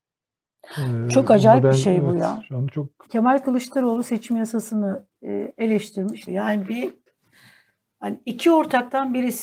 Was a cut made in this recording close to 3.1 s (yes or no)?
yes